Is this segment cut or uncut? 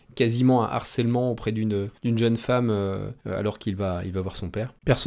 cut